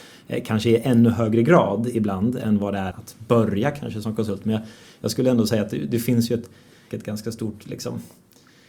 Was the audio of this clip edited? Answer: yes; 2 cuts; at 2.9 s, 6.9 s

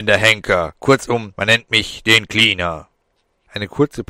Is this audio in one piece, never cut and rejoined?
yes; 0 cuts

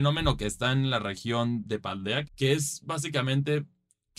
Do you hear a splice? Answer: yes; 1 cut; at 2.2 s

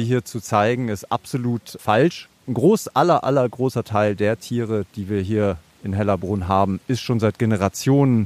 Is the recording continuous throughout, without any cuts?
yes; 0 cuts

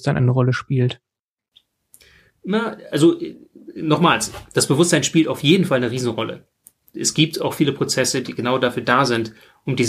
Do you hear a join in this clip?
no; 0 cuts

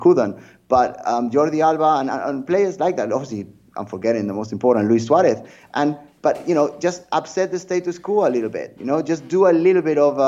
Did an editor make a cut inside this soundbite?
no; 0 cuts

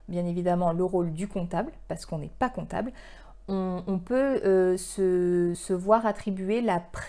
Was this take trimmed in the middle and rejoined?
yes; 1 cut; at 5.5 s

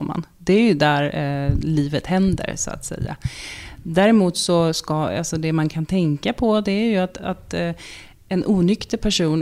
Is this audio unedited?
yes; 0 cuts

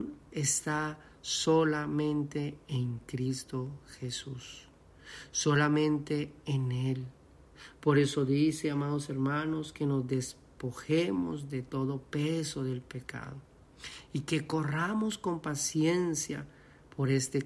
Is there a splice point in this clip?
no; 0 cuts

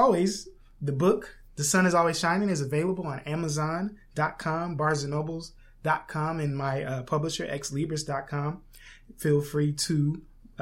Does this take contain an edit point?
no; 0 cuts

